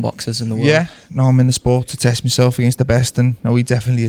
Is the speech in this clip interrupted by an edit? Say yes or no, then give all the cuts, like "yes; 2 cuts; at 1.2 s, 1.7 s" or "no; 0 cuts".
no; 0 cuts